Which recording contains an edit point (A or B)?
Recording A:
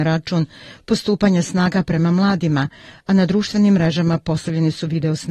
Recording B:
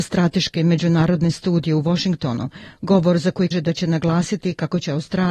B